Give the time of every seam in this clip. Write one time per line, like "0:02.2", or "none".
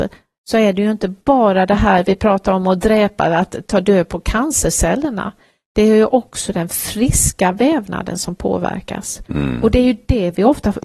0:03.6

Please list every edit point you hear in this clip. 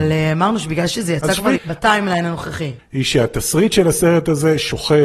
0:01.6
0:02.8

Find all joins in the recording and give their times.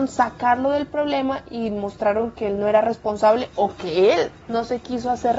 0:04.4

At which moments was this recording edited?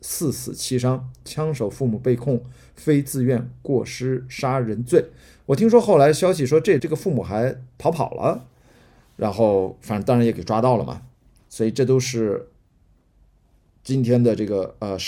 0:06.8

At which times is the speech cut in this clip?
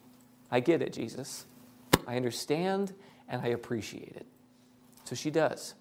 none

